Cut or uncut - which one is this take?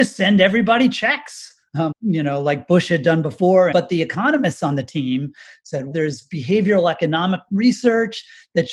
cut